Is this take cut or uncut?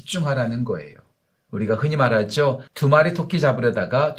cut